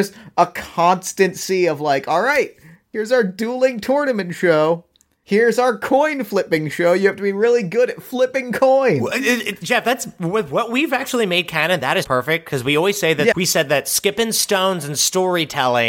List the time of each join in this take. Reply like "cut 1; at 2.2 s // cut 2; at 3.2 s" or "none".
cut 1; at 12.0 s // cut 2; at 13.3 s